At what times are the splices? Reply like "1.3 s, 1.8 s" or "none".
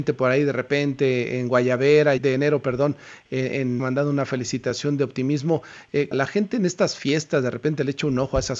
2.2 s, 3.8 s, 6.1 s